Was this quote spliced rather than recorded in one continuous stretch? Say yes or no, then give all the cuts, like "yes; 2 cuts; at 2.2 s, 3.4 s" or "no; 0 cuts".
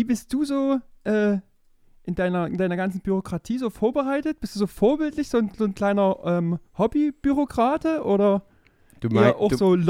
no; 0 cuts